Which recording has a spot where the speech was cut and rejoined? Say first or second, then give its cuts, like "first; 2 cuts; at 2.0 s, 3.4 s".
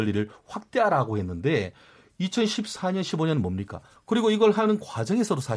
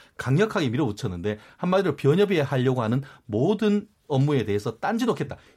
first; 1 cut; at 4.0 s